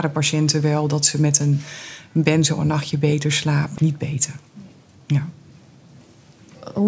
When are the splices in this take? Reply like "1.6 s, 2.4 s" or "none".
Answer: 3.8 s